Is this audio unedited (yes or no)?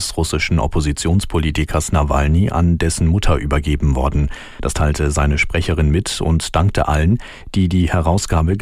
yes